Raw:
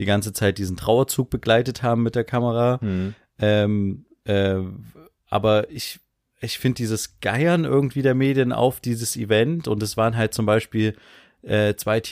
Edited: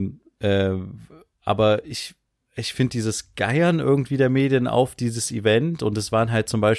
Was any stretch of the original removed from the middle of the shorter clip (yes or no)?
no